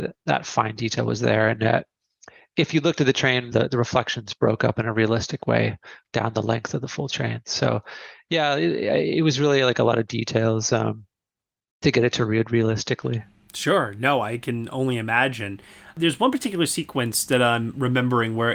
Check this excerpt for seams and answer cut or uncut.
cut